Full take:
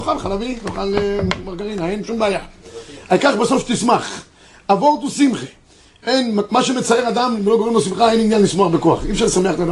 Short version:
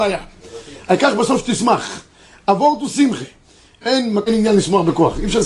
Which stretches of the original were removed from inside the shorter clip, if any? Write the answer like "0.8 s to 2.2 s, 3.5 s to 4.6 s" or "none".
6.5 s to 8.1 s